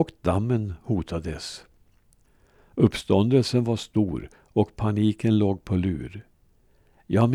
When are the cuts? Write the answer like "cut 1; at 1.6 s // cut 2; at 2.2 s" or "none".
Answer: none